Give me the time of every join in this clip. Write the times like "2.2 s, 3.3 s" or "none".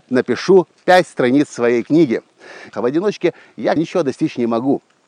2.7 s, 3.8 s

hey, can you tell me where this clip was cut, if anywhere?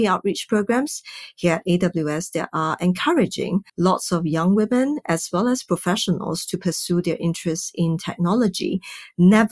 3.7 s

